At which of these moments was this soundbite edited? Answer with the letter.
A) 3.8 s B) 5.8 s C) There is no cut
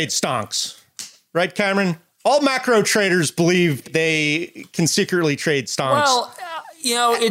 A